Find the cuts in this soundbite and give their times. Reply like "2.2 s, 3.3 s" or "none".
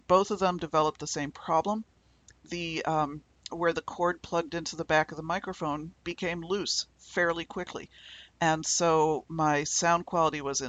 6.0 s